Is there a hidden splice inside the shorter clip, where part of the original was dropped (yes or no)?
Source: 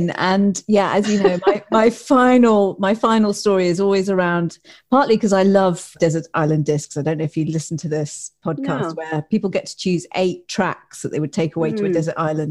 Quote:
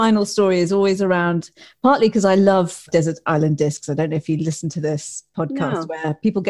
no